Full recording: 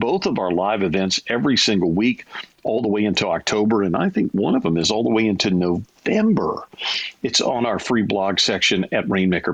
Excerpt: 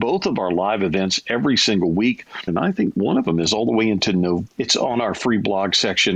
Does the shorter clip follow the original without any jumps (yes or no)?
no